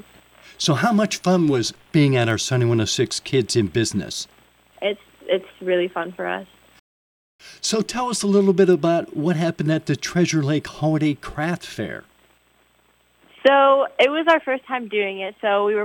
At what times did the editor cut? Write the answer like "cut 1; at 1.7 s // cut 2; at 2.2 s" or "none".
cut 1; at 4.7 s